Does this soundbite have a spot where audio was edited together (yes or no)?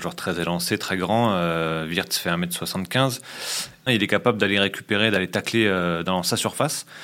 yes